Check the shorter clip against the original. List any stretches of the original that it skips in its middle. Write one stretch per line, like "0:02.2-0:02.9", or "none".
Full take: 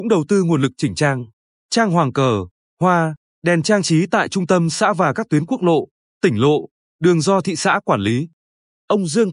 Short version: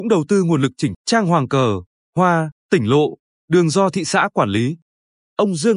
0:00.9-0:01.6
0:03.3-0:06.1